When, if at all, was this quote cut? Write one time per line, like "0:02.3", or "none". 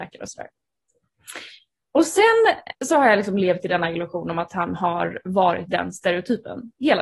0:02.7